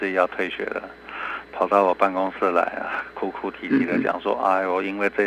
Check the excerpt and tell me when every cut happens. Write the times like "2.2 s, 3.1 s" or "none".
none